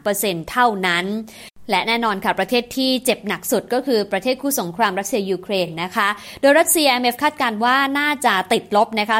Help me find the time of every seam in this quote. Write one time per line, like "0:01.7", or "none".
none

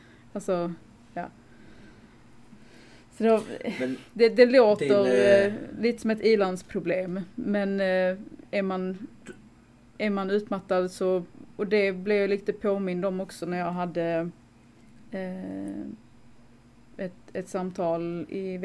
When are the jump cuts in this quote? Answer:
none

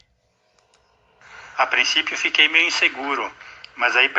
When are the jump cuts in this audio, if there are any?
0:01.5

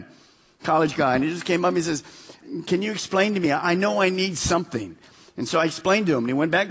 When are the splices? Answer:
none

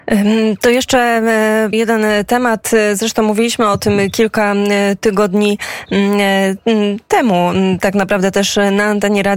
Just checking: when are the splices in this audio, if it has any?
0:01.7

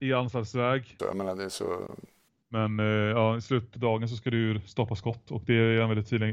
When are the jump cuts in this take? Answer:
0:01.0
0:02.4

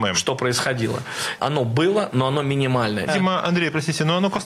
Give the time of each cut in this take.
0:01.4
0:03.1

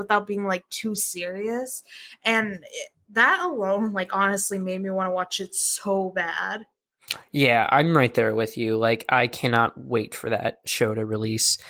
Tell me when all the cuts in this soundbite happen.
none

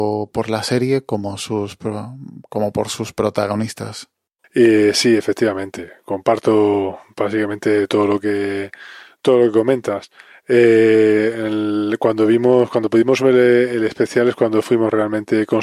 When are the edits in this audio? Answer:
0:04.4

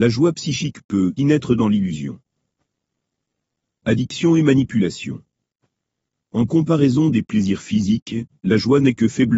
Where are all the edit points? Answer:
0:01.2

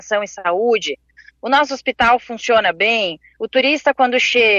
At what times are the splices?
none

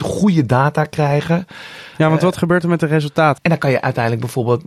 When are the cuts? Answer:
0:03.4

